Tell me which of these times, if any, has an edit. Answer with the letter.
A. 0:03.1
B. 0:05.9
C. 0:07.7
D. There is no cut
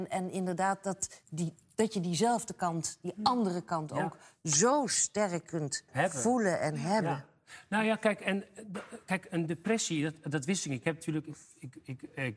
B